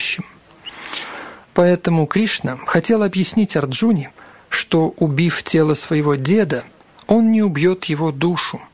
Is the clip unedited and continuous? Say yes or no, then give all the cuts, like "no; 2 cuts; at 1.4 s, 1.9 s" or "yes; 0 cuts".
no; 1 cut; at 1.4 s